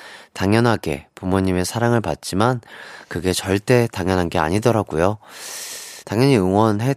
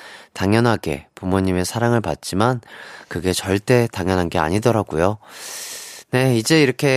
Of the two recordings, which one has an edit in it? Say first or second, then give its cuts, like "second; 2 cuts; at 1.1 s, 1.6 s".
first; 1 cut; at 6.0 s